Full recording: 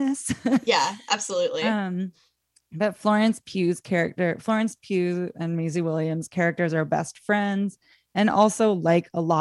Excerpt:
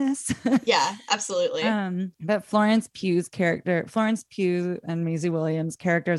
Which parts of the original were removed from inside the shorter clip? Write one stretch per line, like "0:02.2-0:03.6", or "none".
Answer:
0:02.1-0:02.7